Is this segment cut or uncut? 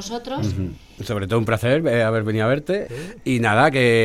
cut